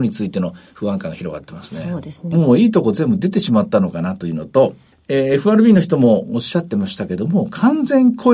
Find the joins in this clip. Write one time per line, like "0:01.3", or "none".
0:02.3
0:04.9